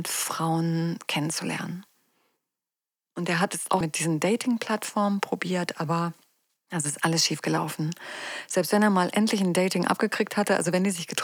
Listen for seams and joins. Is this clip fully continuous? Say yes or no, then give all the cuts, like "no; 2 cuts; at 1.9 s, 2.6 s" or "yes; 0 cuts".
no; 1 cut; at 3.8 s